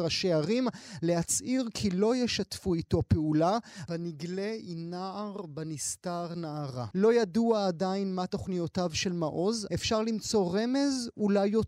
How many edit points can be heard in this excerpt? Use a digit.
3